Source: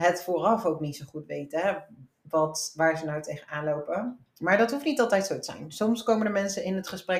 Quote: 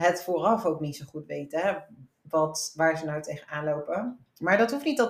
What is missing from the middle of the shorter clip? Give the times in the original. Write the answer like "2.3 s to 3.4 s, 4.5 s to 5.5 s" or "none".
none